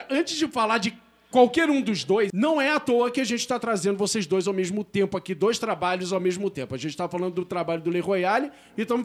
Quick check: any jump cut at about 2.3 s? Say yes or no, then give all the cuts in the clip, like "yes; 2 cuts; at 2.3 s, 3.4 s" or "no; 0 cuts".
yes; 1 cut; at 2.3 s